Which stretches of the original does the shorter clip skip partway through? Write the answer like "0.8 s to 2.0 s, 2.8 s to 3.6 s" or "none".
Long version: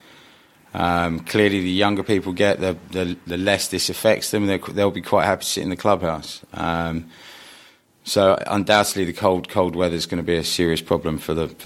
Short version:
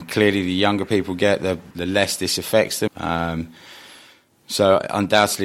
2.9 s to 3.2 s, 4.4 s to 6.4 s

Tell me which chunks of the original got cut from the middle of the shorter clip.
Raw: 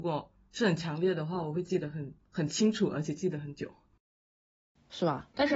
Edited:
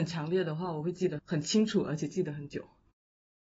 1.9 s to 2.2 s

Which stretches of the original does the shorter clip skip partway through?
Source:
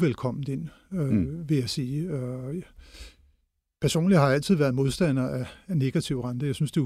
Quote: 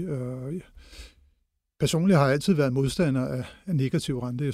none

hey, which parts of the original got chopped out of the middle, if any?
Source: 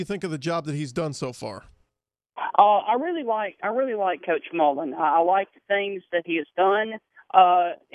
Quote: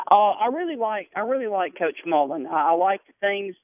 none

